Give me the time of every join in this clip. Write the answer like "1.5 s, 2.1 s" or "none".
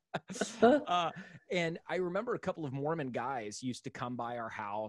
none